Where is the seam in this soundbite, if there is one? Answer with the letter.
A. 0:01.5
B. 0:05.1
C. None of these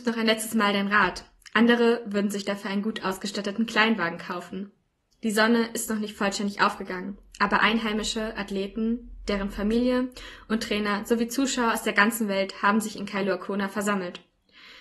B